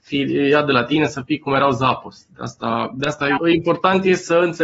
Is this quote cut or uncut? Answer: cut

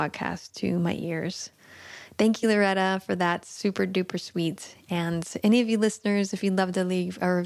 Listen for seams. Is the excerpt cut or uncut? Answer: uncut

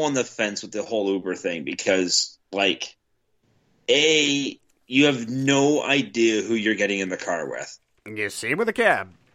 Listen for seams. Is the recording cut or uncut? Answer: uncut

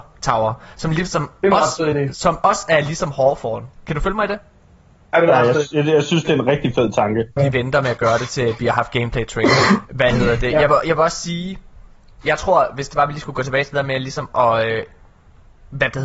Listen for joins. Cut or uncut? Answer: cut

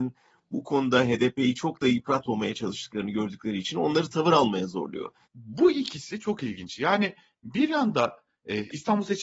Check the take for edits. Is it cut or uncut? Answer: cut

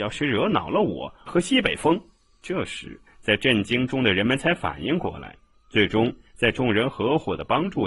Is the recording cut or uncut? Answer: cut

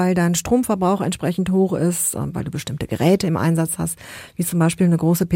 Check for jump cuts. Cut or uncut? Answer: uncut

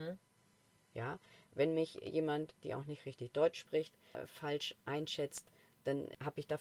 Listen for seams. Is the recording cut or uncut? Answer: cut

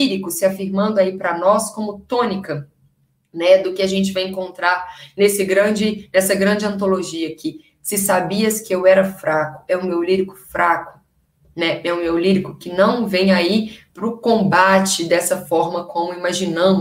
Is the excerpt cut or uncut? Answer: uncut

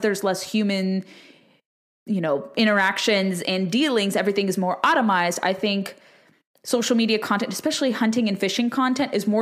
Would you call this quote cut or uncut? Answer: uncut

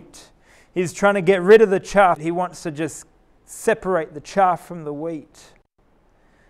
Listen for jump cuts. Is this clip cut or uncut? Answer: cut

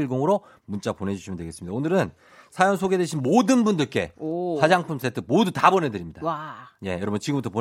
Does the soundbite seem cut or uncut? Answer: uncut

